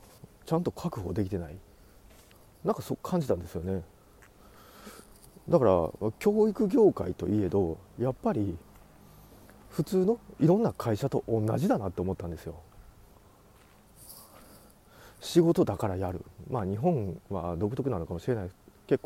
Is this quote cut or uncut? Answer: uncut